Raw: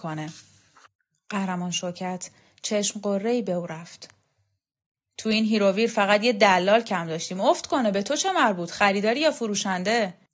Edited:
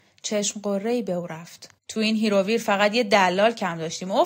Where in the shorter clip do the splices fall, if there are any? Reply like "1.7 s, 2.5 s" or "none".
1.8 s